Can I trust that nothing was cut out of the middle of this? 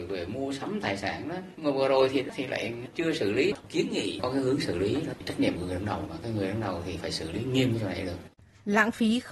yes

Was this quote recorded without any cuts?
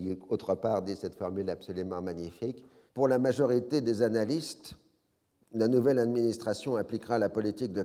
no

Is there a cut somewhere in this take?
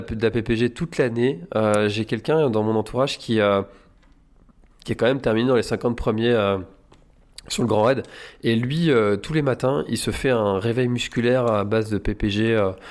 no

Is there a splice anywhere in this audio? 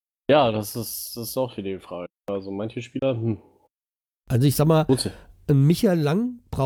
no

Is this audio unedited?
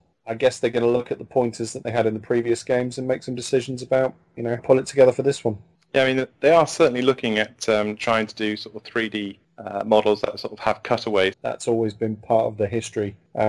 no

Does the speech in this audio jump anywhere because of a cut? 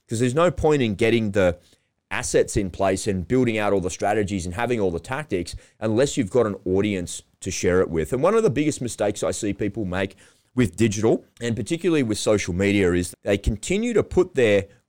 yes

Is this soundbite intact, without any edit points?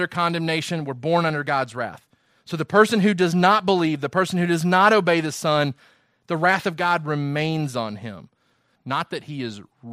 no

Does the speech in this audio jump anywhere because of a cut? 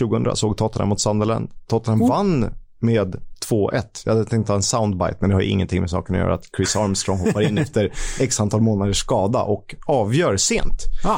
no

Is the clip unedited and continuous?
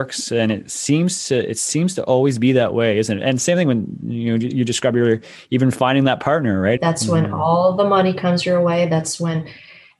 no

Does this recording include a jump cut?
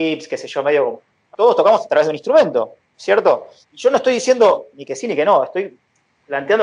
yes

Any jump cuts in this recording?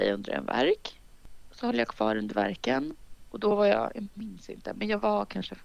no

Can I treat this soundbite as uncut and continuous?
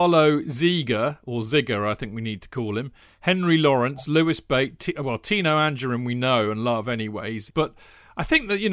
no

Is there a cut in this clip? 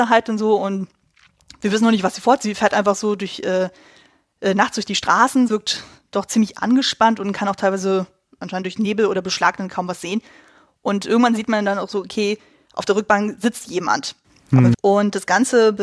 yes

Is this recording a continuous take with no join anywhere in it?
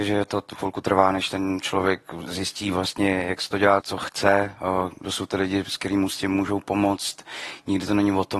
no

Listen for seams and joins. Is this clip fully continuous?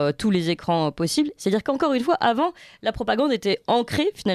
no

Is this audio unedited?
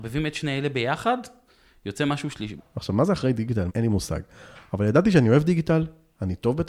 no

